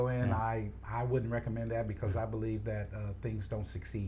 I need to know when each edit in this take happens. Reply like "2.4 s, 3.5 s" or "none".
none